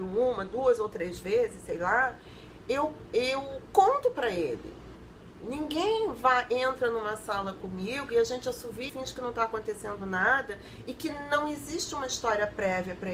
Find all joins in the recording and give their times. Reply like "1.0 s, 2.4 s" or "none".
5.4 s, 8.9 s